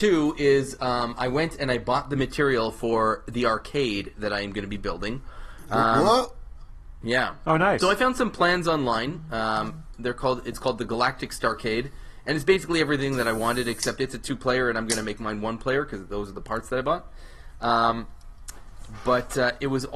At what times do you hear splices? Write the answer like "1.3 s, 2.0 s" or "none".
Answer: none